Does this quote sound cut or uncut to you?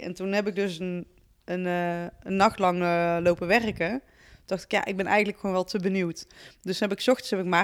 uncut